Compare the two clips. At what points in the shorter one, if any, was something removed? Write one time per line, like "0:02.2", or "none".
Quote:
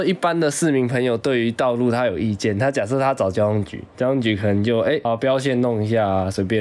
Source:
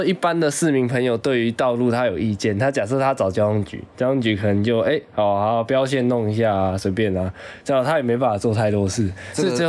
0:05.0